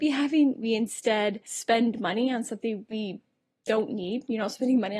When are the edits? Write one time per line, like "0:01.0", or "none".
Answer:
none